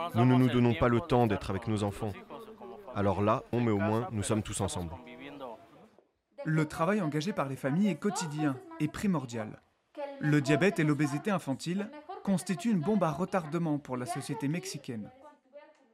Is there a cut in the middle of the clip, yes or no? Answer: yes